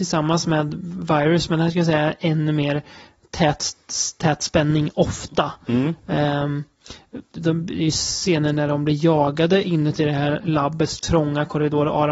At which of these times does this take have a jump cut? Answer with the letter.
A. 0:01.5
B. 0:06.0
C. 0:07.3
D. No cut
D